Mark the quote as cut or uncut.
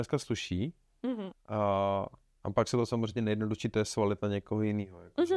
cut